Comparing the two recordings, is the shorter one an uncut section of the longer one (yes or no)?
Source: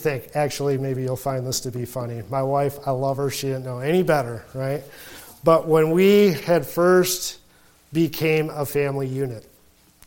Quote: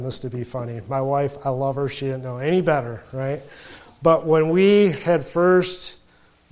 yes